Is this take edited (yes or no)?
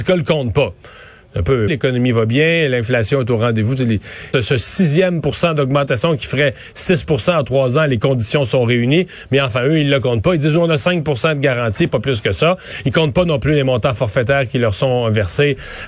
yes